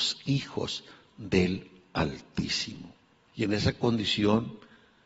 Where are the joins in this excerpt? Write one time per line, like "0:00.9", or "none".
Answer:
0:03.3